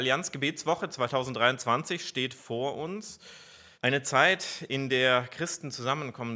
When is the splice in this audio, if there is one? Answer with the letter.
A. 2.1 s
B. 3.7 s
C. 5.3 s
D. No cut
B